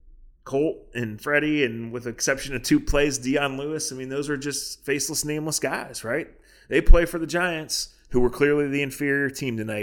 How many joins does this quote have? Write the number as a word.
zero